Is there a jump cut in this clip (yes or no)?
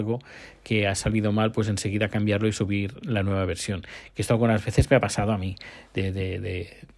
no